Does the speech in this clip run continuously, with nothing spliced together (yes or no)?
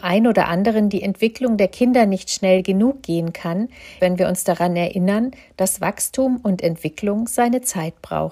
no